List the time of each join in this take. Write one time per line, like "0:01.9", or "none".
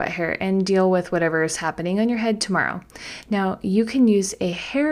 none